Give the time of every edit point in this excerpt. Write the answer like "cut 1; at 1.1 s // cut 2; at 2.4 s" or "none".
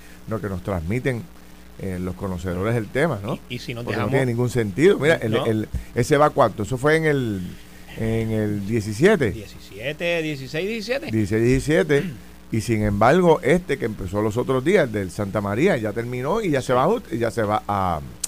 none